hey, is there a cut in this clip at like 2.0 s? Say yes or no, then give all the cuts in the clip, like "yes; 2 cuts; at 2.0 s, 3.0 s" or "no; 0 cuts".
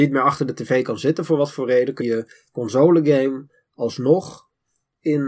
yes; 1 cut; at 2.0 s